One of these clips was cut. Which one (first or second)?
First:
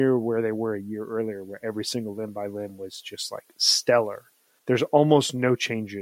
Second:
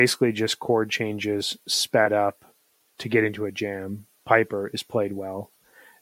first